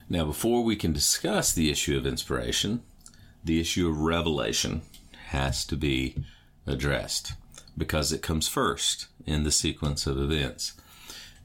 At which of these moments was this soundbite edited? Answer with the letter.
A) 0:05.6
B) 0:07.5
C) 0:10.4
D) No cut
D